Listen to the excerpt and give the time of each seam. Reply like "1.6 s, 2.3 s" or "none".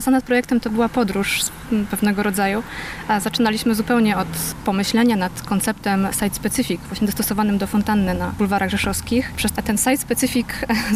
9.6 s